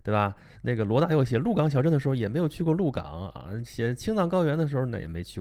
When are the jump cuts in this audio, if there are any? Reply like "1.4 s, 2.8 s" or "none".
none